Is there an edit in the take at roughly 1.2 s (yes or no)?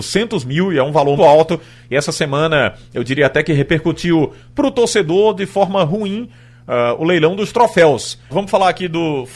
yes